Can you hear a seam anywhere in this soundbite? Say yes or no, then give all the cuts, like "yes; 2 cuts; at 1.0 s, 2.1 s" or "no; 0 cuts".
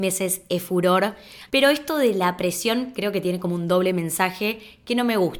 yes; 1 cut; at 1.5 s